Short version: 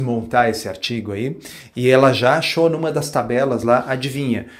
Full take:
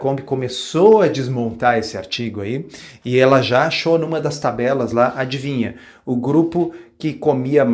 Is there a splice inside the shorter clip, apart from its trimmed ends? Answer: no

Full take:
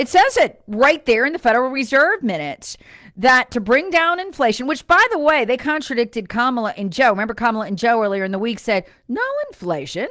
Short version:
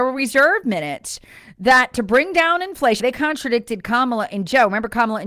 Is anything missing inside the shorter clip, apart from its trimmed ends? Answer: yes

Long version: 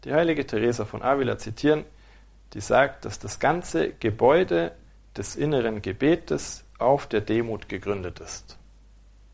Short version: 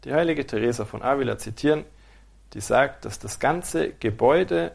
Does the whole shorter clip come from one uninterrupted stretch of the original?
yes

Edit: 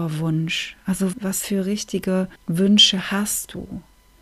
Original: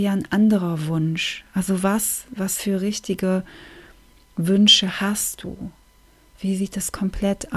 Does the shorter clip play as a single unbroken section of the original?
no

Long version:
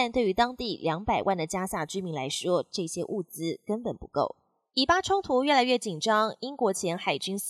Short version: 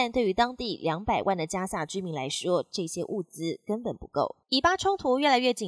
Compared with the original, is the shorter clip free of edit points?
no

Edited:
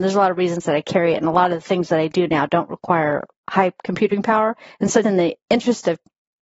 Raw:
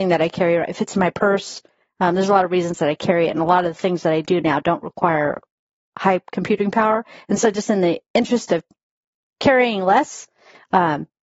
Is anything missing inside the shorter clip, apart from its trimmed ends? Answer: yes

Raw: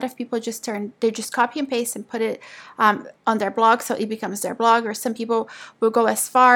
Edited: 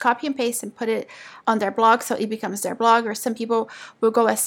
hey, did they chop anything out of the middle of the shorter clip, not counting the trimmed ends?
yes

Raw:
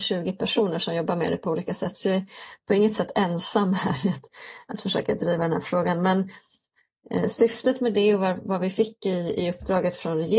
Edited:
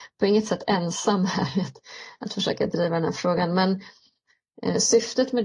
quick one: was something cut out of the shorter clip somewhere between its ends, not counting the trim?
no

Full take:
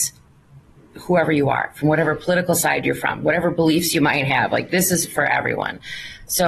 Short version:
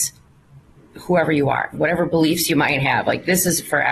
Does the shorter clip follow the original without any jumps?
no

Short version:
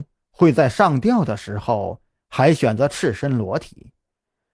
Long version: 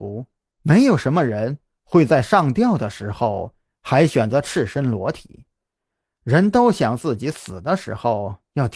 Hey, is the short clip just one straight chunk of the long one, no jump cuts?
yes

